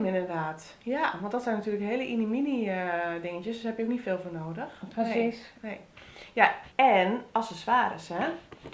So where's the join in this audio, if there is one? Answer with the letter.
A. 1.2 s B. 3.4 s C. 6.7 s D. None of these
C